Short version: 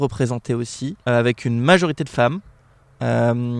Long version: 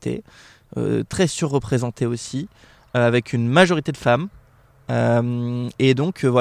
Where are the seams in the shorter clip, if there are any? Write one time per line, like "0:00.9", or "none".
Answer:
0:01.0